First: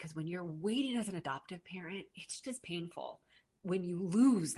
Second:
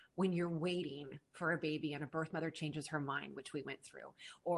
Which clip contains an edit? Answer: first; 1 cut; at 2.4 s

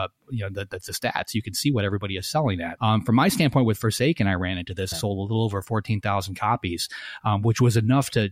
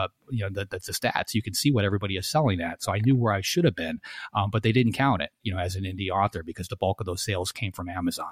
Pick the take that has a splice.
first; 2 cuts; at 2.8 s, 4.9 s

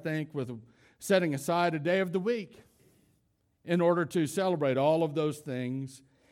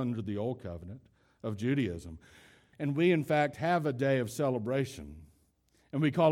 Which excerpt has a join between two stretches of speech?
second; 1 cut; at 2.7 s

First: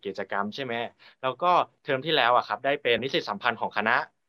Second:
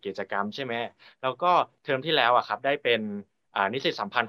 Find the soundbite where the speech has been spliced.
first; 1 cut; at 3.0 s

